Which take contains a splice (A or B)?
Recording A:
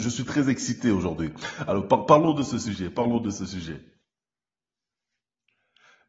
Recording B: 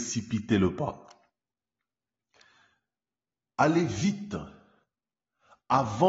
B